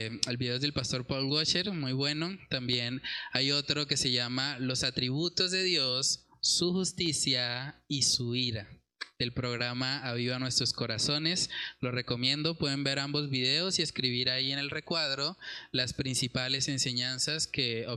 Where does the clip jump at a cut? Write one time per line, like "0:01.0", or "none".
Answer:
none